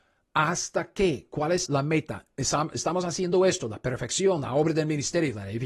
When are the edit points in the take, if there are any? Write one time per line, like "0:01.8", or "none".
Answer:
0:01.7